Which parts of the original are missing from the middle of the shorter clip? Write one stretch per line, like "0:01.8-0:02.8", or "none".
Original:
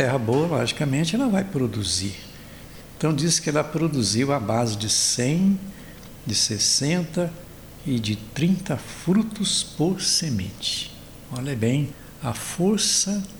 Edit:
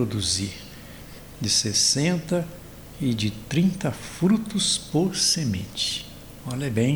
0:03.0-0:06.2